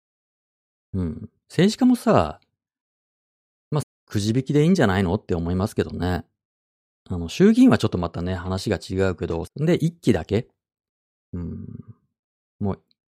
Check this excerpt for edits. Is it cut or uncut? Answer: cut